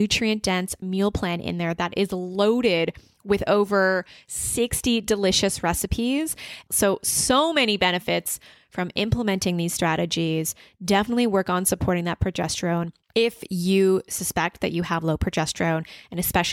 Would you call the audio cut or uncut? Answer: cut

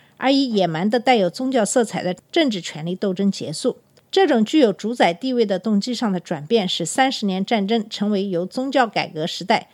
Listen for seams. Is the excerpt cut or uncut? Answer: uncut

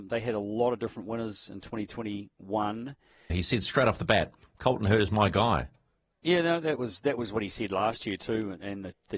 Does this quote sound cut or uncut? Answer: cut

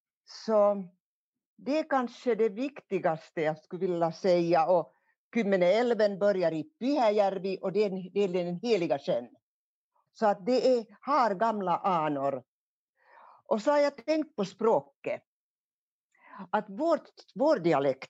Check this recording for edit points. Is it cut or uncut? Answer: cut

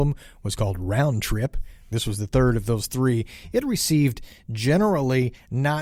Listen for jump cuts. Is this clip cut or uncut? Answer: cut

